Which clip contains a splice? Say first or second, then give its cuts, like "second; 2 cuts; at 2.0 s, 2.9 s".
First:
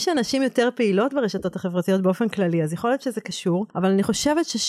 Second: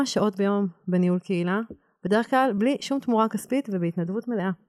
first; 1 cut; at 3.7 s